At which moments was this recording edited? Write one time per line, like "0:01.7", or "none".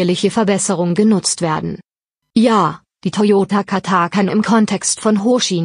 0:02.2